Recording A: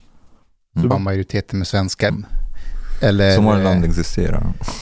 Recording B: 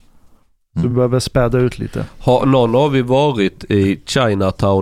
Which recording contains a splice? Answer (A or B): A